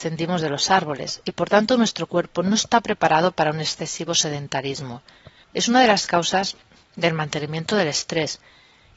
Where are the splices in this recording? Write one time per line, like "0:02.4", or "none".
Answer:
0:05.4